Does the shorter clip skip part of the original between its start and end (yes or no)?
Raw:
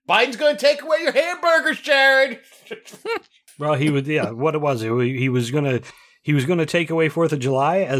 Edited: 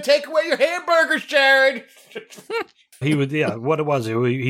yes